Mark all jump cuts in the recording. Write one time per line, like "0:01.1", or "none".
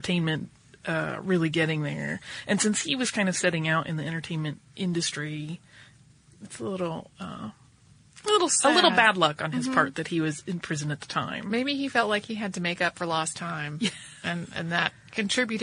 none